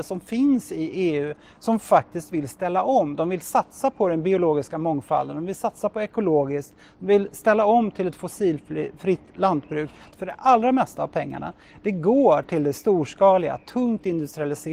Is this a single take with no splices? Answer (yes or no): no